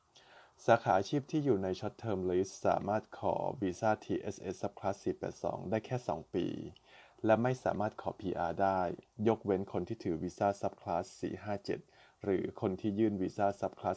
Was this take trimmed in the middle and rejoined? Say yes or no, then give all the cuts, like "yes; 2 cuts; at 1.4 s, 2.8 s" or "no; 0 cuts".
no; 0 cuts